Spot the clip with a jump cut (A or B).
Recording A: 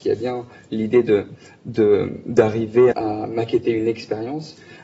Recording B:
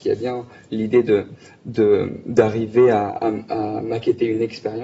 A